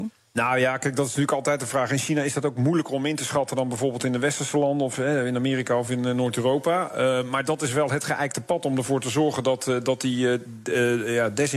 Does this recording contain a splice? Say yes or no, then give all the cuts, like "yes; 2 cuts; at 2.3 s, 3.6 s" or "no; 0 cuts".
no; 0 cuts